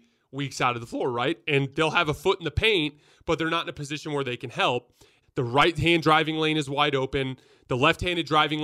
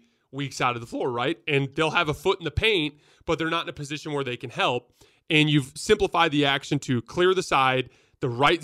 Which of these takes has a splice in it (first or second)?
first